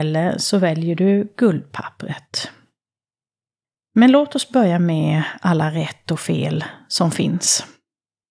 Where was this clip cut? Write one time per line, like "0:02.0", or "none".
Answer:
none